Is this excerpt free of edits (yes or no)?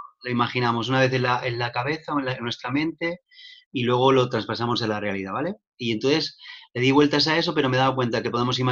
yes